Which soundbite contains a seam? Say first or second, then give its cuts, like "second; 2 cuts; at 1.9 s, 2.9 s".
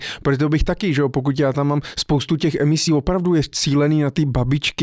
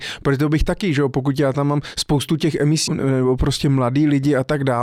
second; 1 cut; at 2.9 s